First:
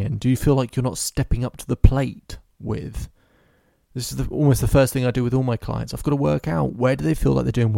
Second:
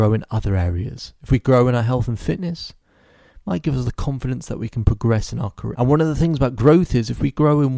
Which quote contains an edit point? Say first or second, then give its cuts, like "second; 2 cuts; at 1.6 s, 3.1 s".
second; 1 cut; at 5.7 s